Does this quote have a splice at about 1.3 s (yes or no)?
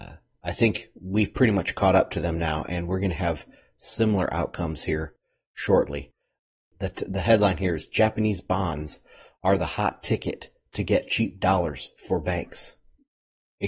no